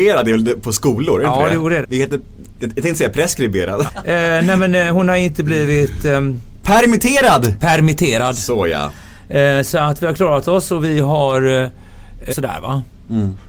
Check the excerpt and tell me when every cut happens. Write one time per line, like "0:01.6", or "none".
0:01.8
0:03.9
0:12.3

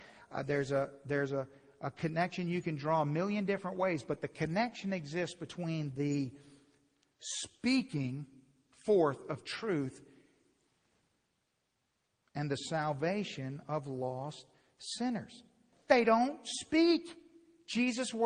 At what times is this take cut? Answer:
0:15.7

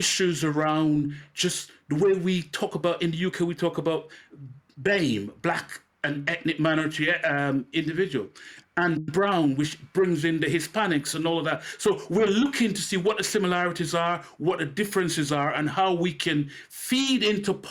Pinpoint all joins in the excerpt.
0:08.6

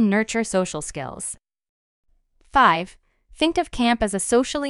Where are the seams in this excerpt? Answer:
none

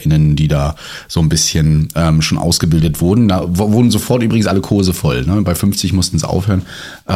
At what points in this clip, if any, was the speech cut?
none

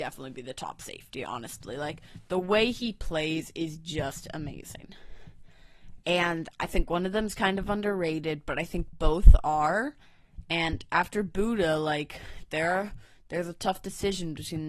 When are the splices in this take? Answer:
0:06.0

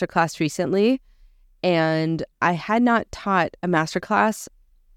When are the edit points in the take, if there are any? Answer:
none

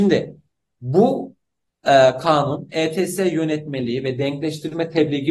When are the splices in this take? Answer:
none

